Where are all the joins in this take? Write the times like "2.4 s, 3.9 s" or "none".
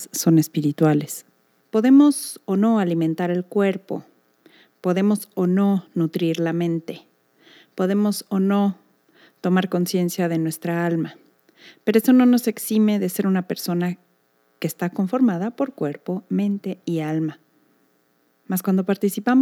1.6 s